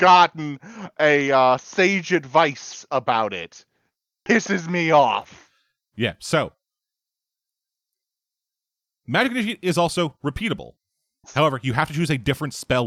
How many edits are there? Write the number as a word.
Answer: one